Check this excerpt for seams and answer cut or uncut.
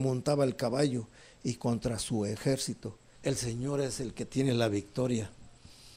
cut